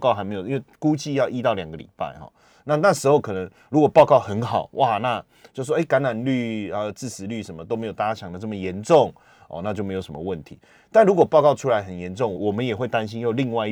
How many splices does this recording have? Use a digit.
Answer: 1